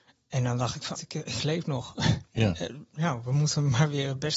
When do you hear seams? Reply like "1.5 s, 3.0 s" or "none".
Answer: 0.9 s